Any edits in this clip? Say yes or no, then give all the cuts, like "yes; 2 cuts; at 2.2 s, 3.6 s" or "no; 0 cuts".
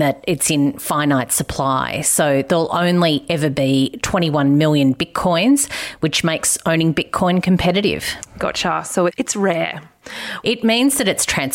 yes; 2 cuts; at 9.1 s, 10.4 s